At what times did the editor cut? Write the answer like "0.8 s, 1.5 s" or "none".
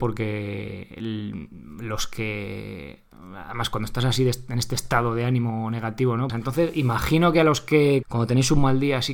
6.3 s, 8.0 s